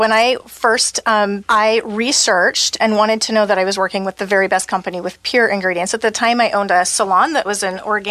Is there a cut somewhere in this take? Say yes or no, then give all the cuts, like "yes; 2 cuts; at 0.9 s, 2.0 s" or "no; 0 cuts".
yes; 1 cut; at 1.4 s